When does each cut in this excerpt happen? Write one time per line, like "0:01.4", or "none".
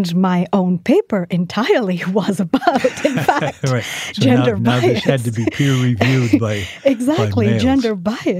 none

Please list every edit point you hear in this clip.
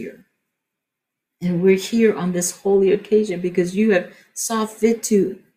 0:01.3

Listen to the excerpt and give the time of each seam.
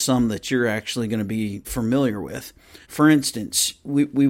0:01.6
0:02.8

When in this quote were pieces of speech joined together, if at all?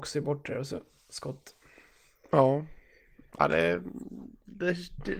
none

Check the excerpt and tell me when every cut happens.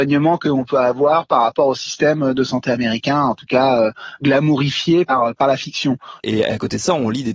0:06.2

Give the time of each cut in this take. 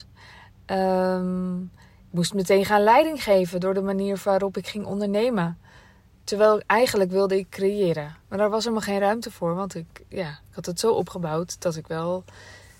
0:08.2

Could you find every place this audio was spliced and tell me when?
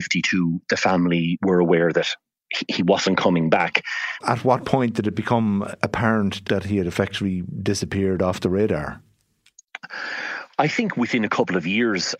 0:04.2

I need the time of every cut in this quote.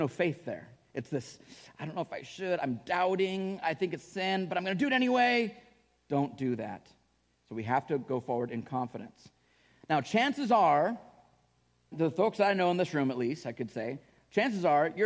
0:07.3
0:11.9

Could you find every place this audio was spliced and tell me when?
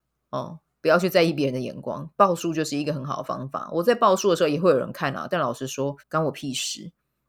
0:06.0

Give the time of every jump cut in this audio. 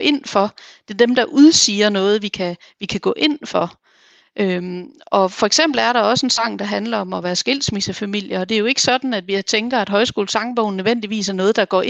none

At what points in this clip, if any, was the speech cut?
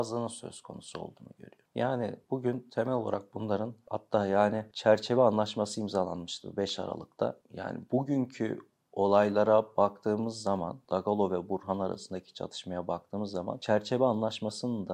none

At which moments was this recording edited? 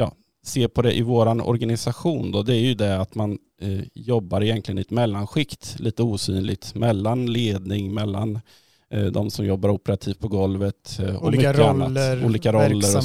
none

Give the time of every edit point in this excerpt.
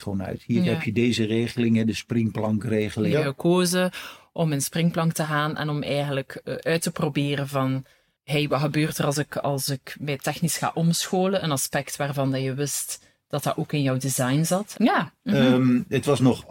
0:03.1
0:14.7

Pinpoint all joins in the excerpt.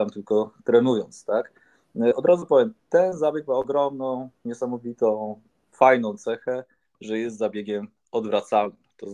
none

